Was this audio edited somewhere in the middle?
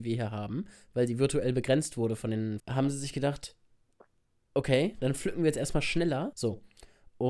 yes; 2 cuts; at 2.6 s, 6.3 s

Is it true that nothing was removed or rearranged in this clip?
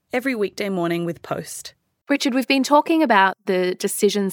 no; 1 cut; at 2.0 s

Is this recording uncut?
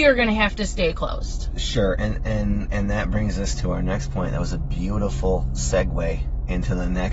yes; 0 cuts

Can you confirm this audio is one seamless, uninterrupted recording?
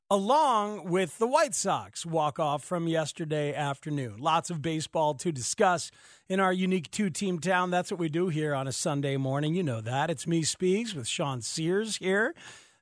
yes; 0 cuts

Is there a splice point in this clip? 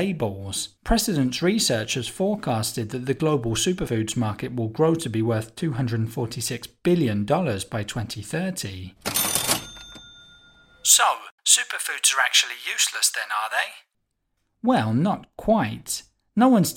no; 0 cuts

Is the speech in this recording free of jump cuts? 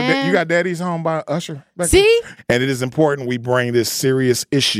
no; 1 cut; at 2.4 s

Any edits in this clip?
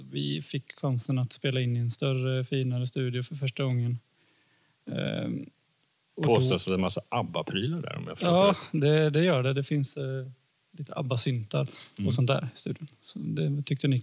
no; 0 cuts

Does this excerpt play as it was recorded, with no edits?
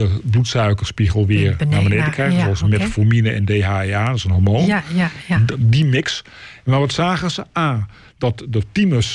yes; 0 cuts

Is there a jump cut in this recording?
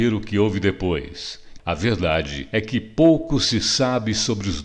yes; 1 cut; at 1.6 s

